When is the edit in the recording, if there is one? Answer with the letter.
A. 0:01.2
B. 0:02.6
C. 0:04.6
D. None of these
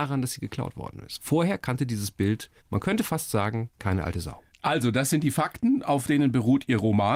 B